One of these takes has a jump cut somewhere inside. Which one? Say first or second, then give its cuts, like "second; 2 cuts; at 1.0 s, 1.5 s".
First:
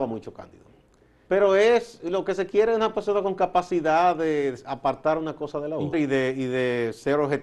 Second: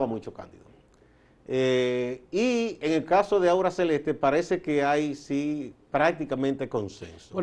first; 2 cuts; at 1.3 s, 5.9 s